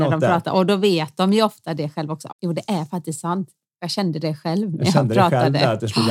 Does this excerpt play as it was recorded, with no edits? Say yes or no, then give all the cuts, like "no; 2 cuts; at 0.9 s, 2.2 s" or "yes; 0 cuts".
no; 1 cut; at 2.3 s